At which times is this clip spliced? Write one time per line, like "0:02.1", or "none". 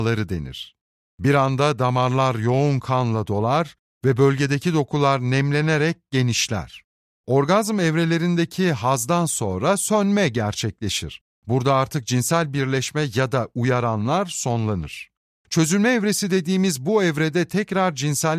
none

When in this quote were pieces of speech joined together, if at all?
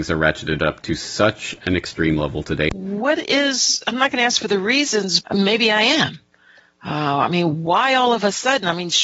0:02.7
0:05.2

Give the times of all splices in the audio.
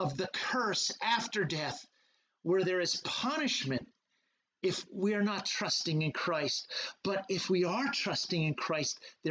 none

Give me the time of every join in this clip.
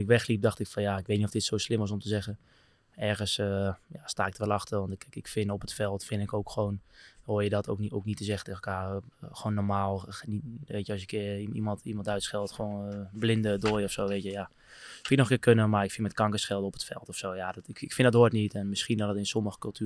none

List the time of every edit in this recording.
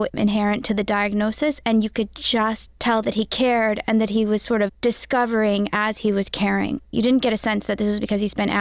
0:06.9

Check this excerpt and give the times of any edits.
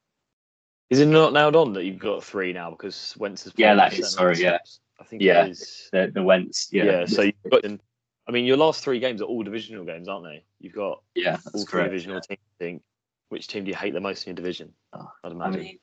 0:07.6
0:13.3
0:14.9

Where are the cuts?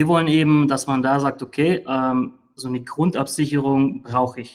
none

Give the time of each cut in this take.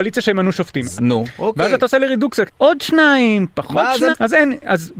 0:01.0
0:02.5
0:04.1

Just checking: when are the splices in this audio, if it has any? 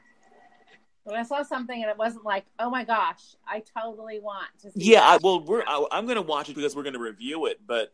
0:05.2
0:06.5

